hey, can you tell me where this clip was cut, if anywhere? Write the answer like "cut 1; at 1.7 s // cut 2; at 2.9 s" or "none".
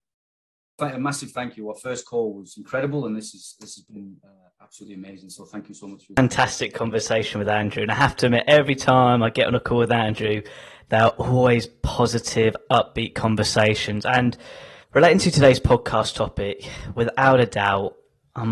cut 1; at 14.8 s